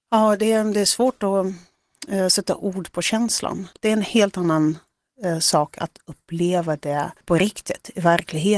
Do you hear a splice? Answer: yes; 2 cuts; at 3.7 s, 7.2 s

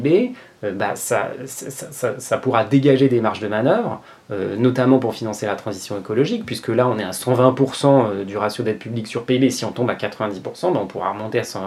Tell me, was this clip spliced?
no; 0 cuts

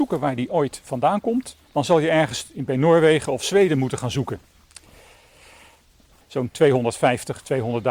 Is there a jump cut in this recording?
yes; 2 cuts; at 1.6 s, 6.2 s

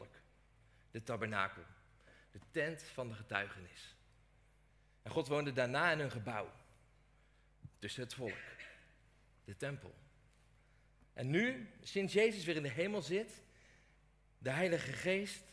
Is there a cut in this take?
no; 0 cuts

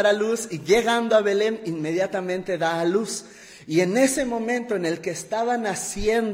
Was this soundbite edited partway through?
no; 0 cuts

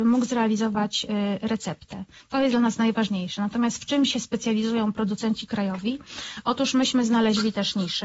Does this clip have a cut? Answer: no; 0 cuts

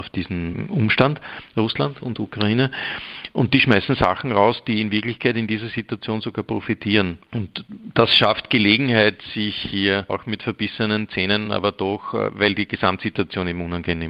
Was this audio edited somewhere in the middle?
no; 0 cuts

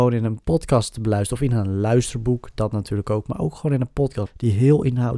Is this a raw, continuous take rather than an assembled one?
no; 1 cut; at 4.3 s

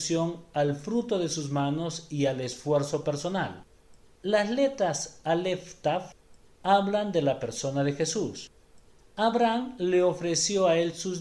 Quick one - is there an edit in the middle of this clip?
yes; 1 cut; at 9.0 s

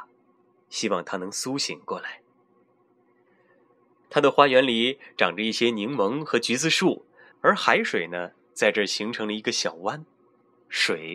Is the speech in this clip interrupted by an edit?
yes; 2 cuts; at 4.0 s, 7.3 s

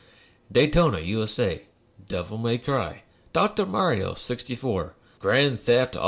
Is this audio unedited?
no; 1 cut; at 5.2 s

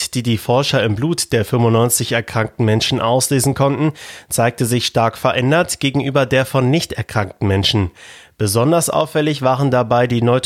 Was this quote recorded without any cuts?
yes; 0 cuts

